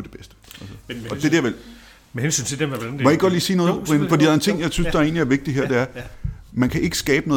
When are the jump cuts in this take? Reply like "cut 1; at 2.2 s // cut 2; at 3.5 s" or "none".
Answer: none